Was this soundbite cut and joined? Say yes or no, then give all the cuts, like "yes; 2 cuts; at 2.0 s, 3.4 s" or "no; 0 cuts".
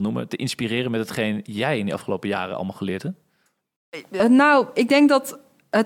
no; 0 cuts